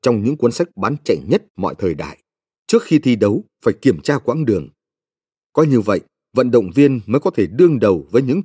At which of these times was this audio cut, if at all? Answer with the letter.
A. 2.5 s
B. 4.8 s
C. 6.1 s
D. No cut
A